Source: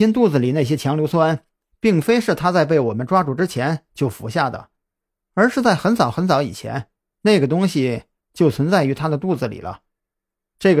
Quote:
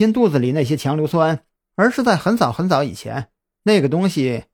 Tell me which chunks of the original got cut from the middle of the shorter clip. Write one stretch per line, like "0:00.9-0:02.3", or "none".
0:01.6-0:05.2

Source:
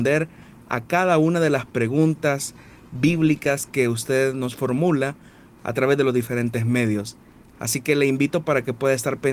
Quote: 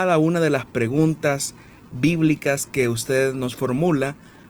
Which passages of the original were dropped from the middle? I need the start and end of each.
none

